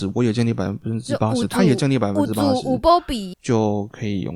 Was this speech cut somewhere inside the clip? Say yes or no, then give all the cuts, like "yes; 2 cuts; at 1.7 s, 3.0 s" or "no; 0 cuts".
yes; 1 cut; at 3.3 s